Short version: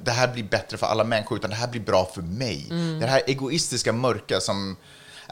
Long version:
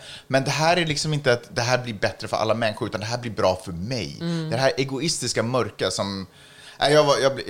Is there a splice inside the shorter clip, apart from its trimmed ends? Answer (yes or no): no